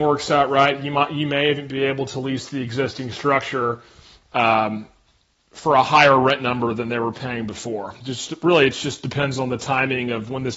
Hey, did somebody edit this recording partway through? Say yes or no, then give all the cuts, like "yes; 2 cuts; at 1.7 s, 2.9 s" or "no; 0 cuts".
no; 0 cuts